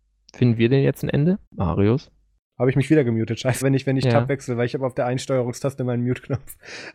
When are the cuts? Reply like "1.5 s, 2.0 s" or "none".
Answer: 1.5 s, 3.6 s